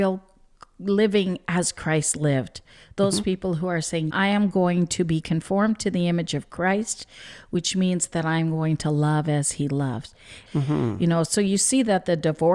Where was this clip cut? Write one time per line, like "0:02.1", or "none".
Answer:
0:04.1
0:10.5

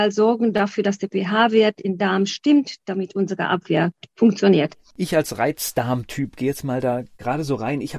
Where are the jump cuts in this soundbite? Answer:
none

